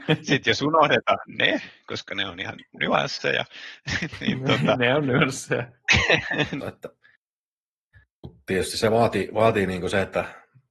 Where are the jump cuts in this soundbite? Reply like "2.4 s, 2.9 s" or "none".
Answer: 6.6 s